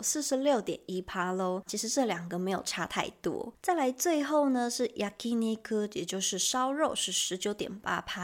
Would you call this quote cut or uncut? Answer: cut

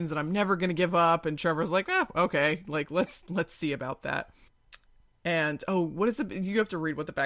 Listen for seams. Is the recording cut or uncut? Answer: uncut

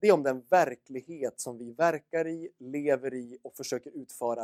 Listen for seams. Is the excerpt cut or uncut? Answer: uncut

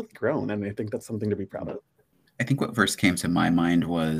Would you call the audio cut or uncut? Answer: uncut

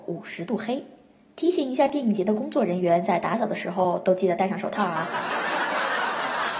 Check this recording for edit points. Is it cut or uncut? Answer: uncut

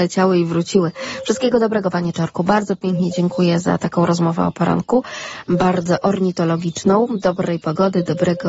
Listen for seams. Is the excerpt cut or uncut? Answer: uncut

